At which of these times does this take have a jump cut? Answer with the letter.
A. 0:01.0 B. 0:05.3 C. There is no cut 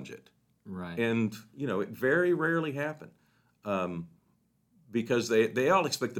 C